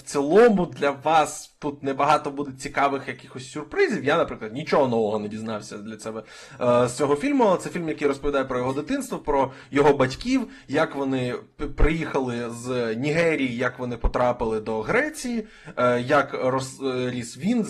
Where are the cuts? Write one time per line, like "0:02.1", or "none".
none